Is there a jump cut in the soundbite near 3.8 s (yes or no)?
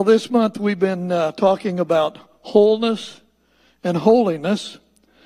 no